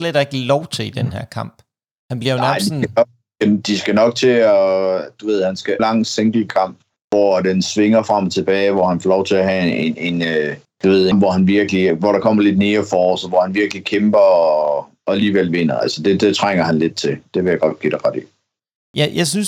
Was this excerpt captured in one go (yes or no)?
no